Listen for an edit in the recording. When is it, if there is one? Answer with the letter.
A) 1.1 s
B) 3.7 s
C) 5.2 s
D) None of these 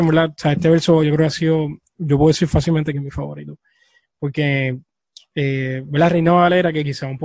D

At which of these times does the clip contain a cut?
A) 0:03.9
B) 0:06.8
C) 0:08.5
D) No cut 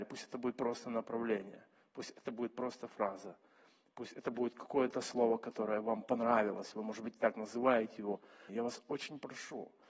C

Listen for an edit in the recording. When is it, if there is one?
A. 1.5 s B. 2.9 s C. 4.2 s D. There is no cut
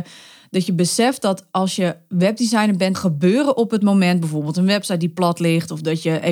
B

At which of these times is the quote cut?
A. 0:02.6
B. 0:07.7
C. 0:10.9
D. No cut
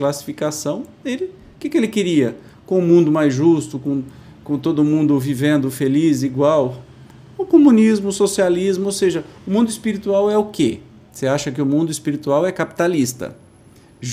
D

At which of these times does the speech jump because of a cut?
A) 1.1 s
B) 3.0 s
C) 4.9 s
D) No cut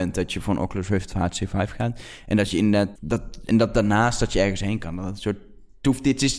B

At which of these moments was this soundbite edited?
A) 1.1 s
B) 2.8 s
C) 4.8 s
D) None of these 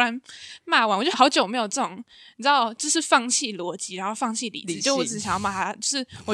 A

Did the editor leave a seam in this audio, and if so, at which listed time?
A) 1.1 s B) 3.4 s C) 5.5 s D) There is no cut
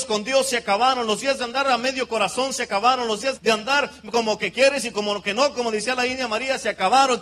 B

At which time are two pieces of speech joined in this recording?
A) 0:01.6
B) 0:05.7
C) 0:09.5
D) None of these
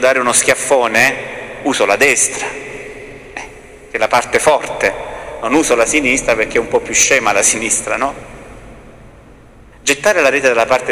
D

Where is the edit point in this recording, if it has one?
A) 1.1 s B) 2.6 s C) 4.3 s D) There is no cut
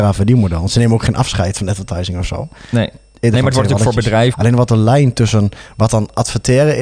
C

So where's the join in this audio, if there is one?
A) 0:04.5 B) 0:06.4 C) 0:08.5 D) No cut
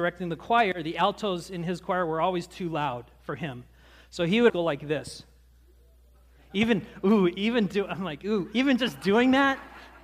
A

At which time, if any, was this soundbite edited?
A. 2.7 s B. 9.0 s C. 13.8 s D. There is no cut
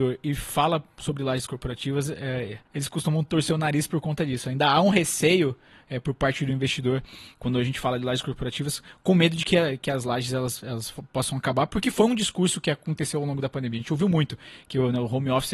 A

